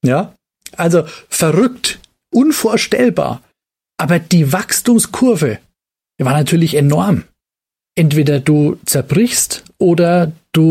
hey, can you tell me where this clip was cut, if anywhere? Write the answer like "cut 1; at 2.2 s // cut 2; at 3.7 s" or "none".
none

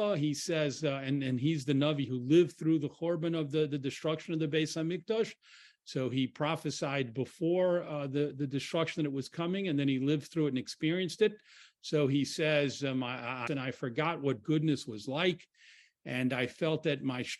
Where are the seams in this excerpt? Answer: cut 1; at 13.5 s

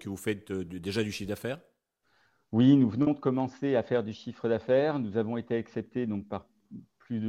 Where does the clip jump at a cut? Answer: none

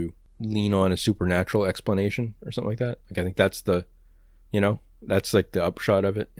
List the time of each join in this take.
none

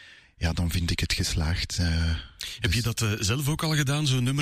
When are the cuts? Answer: none

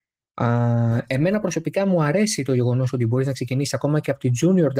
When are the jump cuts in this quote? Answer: none

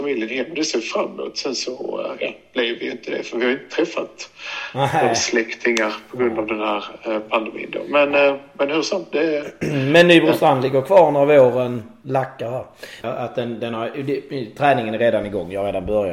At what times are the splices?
cut 1; at 13.0 s

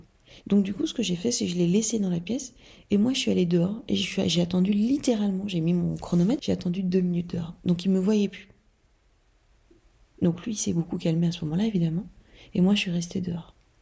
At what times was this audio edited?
cut 1; at 6.4 s

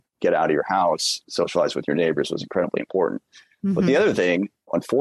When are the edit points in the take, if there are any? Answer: cut 1; at 1.2 s

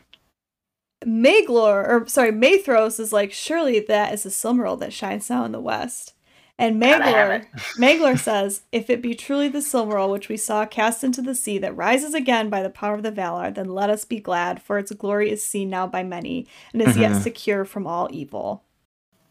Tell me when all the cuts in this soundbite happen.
none

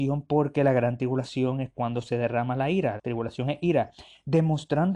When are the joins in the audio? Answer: cut 1; at 3.0 s

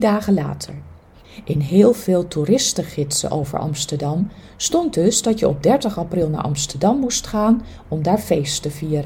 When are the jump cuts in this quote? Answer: none

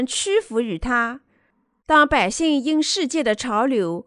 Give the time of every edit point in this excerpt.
cut 1; at 1.8 s

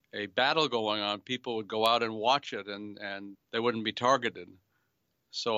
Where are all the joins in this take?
cut 1; at 3.4 s

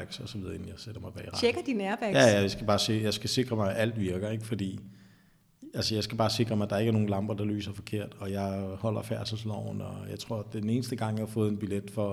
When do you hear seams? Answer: none

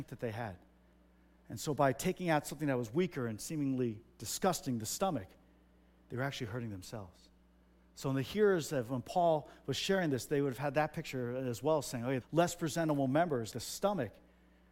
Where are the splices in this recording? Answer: cut 1; at 12.2 s // cut 2; at 13.5 s

